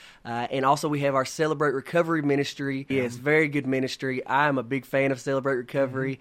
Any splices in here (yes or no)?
yes